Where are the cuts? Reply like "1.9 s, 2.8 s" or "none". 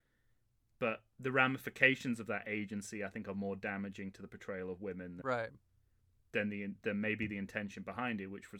5.2 s